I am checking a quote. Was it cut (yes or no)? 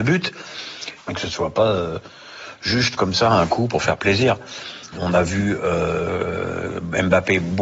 yes